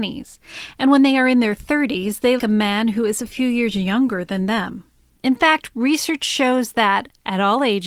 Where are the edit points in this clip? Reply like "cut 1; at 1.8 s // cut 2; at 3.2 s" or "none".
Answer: cut 1; at 2.4 s // cut 2; at 5.2 s